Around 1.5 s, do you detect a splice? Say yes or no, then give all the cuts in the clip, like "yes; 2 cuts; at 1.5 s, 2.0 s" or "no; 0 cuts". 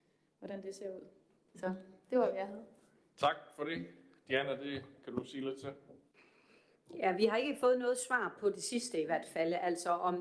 yes; 1 cut; at 1.5 s